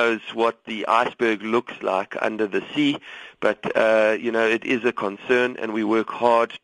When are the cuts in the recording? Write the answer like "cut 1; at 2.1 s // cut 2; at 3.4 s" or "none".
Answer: none